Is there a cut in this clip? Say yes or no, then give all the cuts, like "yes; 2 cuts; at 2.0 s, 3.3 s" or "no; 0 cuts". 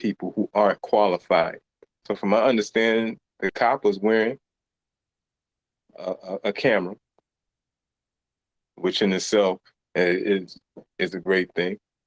yes; 1 cut; at 2.0 s